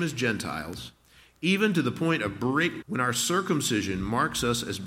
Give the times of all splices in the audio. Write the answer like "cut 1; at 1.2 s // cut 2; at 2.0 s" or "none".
cut 1; at 2.8 s